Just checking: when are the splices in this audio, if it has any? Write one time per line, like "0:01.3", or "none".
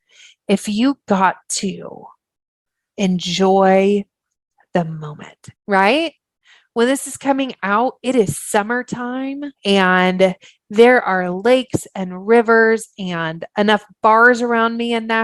0:05.6
0:09.5